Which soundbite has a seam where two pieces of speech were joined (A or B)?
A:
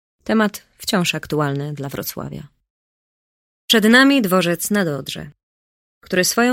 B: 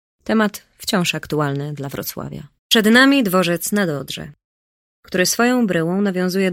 B